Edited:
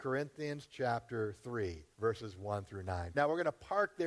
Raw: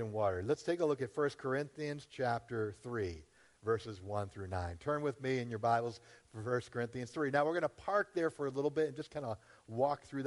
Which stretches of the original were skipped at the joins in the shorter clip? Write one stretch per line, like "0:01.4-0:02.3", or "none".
0:03.3-0:03.6
0:04.8-0:07.3